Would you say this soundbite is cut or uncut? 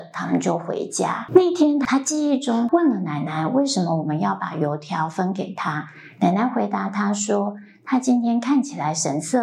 uncut